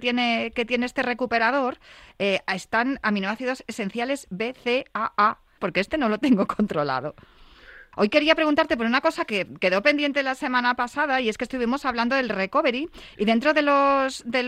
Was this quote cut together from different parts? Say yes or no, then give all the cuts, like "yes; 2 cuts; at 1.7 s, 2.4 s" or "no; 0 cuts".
yes; 2 cuts; at 5.6 s, 7.9 s